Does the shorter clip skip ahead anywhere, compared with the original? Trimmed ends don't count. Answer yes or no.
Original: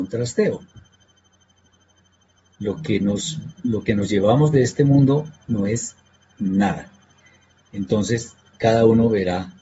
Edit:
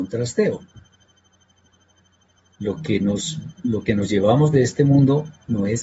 no